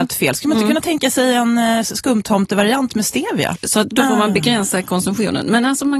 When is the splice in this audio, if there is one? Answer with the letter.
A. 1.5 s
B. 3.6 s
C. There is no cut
B